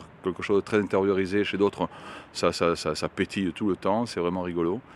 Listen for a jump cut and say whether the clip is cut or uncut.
cut